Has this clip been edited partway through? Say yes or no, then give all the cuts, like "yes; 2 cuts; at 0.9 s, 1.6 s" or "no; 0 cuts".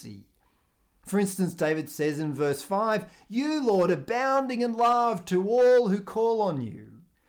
yes; 1 cut; at 3.9 s